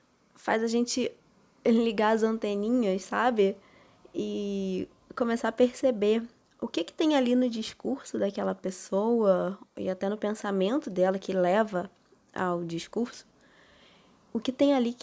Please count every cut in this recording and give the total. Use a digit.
0